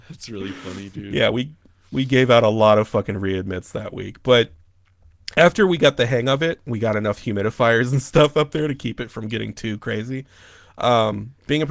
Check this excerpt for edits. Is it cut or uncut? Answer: uncut